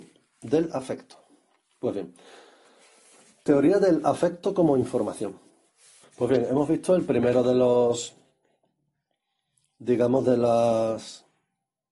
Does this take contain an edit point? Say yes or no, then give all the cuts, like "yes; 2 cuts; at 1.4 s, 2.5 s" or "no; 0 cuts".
yes; 1 cut; at 6.0 s